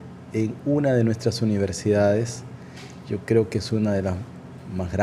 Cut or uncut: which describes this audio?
uncut